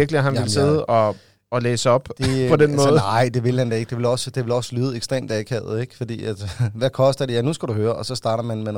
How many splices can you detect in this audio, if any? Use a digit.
0